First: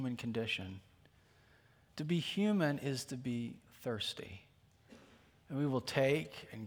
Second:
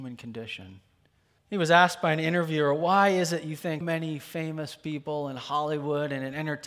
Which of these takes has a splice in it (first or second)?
second